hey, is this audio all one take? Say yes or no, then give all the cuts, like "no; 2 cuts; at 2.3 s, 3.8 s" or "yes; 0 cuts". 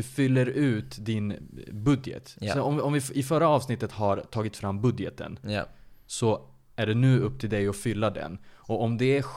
yes; 0 cuts